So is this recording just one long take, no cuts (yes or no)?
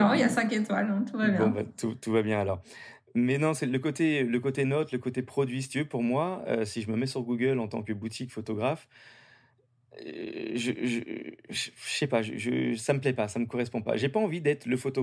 yes